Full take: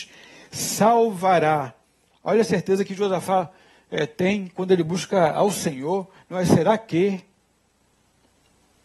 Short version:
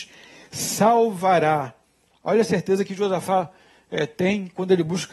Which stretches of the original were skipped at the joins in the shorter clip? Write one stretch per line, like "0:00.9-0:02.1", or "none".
none

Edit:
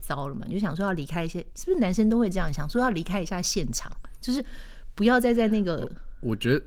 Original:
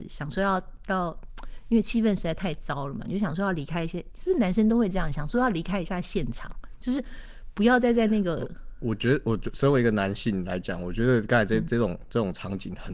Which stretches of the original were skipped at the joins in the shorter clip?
none

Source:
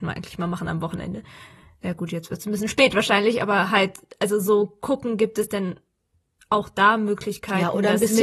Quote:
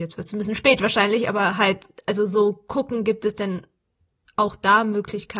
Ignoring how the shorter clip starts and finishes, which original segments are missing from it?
none

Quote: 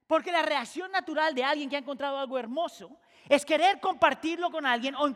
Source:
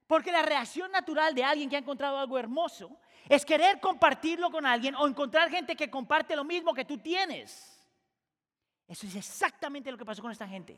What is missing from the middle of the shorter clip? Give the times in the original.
none

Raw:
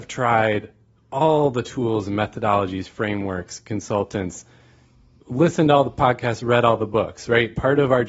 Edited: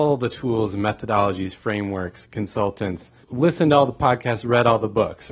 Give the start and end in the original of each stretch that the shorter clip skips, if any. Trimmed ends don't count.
0:04.5-0:05.2

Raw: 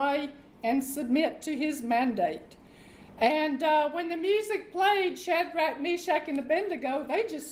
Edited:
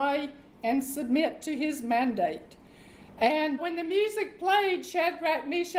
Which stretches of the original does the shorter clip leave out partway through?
0:03.6-0:03.9

